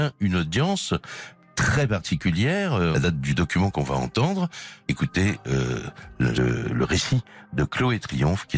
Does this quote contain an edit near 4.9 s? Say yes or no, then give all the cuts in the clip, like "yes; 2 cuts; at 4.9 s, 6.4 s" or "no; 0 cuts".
yes; 3 cuts; at 2.9 s, 4.9 s, 6.3 s